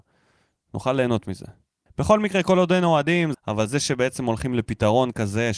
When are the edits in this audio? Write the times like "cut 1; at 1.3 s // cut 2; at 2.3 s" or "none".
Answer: cut 1; at 1.9 s // cut 2; at 3.3 s